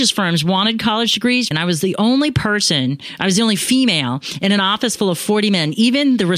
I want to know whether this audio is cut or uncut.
cut